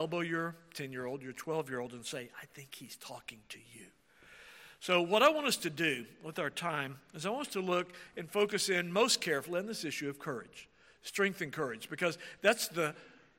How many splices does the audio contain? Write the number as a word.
zero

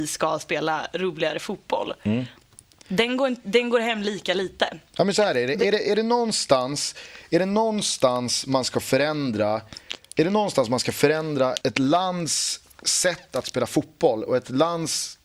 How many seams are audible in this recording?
two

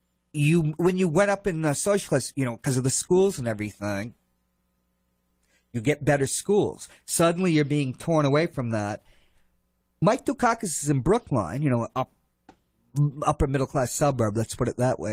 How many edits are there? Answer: zero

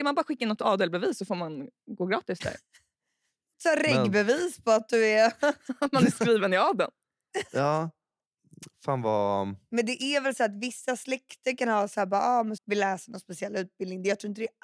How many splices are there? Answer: one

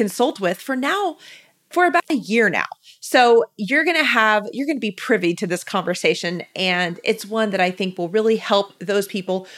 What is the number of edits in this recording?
zero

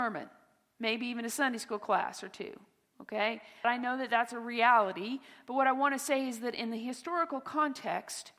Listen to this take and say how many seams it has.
one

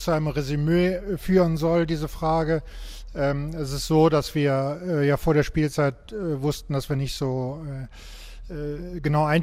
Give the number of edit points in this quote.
zero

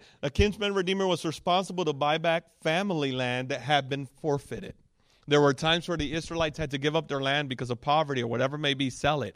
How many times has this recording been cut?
zero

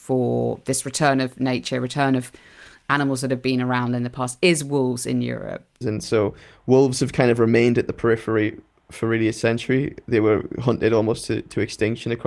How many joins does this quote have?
one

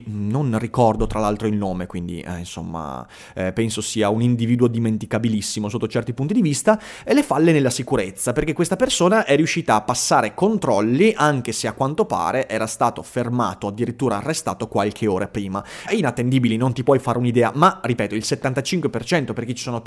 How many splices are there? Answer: one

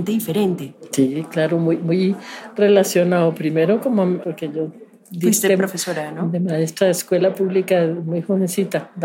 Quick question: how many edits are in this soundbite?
one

